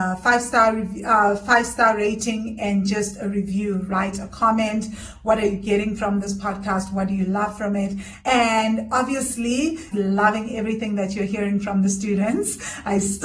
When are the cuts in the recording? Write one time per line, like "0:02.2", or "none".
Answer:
0:08.2
0:09.9